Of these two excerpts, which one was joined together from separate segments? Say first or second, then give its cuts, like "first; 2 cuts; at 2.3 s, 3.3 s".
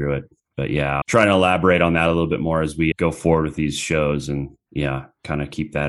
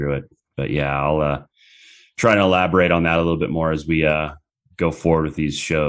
first; 2 cuts; at 1.0 s, 2.9 s